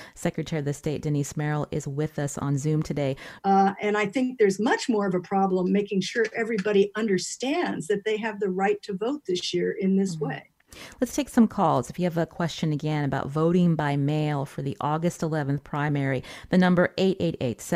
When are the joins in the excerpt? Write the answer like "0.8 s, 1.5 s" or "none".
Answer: 3.4 s